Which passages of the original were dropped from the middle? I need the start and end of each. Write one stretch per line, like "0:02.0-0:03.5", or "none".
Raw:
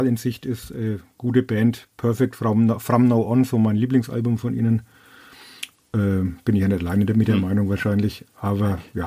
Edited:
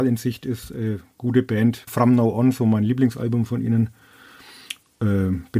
0:01.9-0:02.8